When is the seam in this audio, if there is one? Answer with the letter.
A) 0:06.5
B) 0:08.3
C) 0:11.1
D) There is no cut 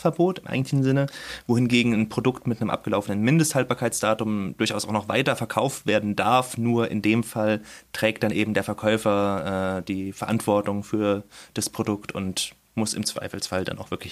D